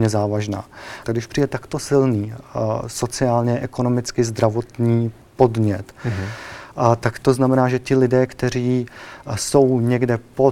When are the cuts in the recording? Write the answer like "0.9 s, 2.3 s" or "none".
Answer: 1.0 s